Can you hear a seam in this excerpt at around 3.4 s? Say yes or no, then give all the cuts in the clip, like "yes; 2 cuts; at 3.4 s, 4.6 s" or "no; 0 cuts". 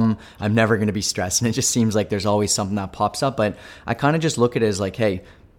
no; 0 cuts